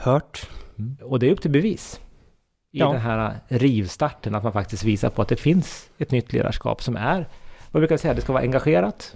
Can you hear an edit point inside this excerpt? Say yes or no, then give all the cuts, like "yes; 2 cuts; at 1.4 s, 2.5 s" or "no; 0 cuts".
yes; 1 cut; at 1.0 s